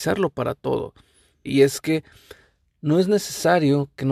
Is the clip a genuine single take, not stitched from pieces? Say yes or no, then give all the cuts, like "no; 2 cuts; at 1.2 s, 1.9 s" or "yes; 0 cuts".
no; 1 cut; at 1.5 s